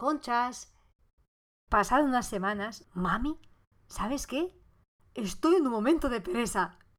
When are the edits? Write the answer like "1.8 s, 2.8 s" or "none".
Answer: 1.7 s, 2.8 s